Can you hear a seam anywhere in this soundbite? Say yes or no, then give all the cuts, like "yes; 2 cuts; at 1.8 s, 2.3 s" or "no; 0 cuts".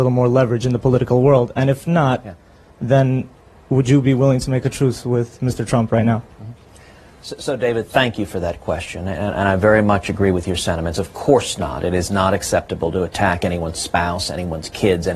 no; 0 cuts